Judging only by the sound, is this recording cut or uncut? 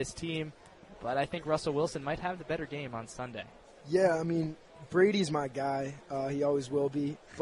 uncut